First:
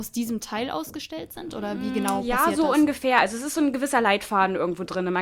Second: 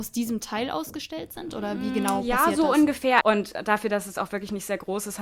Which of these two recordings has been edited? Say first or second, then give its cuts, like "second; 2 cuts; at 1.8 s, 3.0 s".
second; 1 cut; at 3.2 s